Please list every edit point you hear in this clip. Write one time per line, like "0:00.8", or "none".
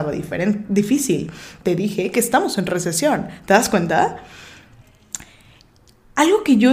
0:01.6